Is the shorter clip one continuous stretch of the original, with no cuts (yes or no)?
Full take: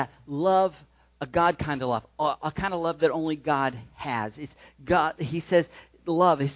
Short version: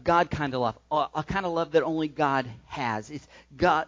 yes